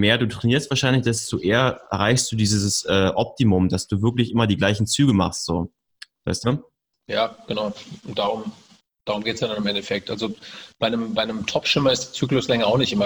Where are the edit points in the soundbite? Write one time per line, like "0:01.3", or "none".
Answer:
none